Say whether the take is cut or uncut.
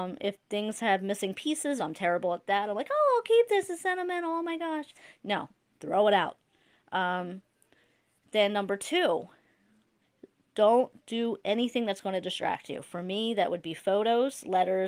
cut